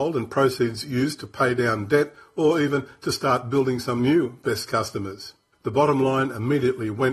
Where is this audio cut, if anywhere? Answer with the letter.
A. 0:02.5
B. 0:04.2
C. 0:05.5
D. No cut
C